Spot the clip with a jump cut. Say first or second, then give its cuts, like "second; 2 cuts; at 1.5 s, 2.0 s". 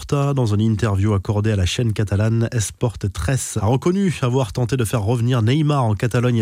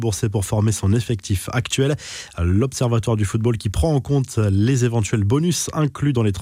first; 1 cut; at 3.6 s